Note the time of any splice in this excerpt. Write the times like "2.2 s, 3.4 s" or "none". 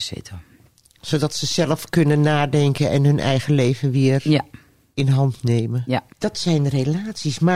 6.1 s